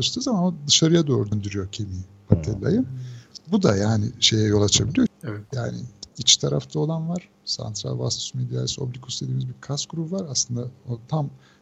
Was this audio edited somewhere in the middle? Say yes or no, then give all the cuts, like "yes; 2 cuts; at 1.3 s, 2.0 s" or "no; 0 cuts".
yes; 2 cuts; at 1.3 s, 5.1 s